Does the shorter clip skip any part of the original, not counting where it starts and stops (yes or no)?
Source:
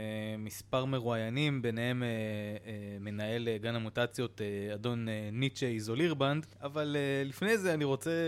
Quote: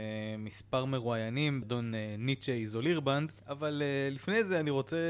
yes